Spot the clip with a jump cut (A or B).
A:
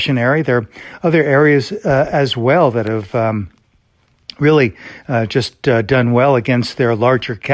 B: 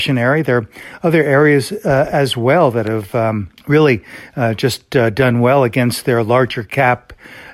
B